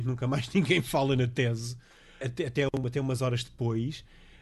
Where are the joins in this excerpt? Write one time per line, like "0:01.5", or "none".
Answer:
0:02.2